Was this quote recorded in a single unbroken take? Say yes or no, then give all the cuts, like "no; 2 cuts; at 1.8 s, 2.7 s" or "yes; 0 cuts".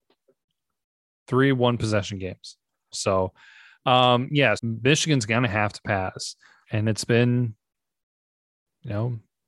no; 3 cuts; at 2.9 s, 4.6 s, 6.6 s